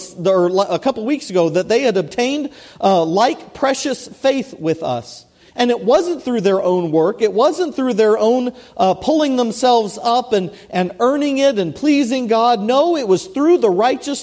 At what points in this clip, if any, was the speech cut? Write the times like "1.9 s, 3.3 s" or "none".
none